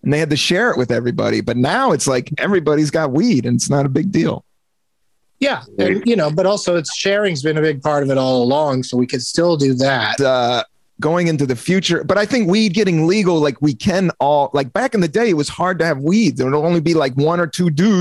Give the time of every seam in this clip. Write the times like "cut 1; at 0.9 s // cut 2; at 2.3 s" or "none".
cut 1; at 10.2 s